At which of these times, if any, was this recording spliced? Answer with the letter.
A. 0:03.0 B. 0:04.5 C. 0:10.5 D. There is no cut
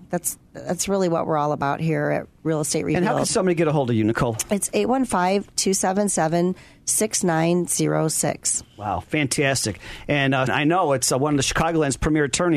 C